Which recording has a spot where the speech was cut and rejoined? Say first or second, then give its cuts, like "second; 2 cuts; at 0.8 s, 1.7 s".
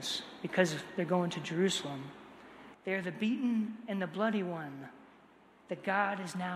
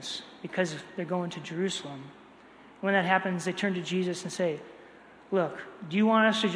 first; 1 cut; at 2.7 s